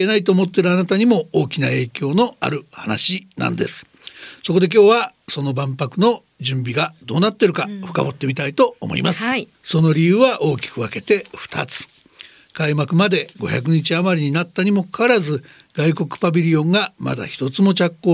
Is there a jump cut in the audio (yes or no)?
yes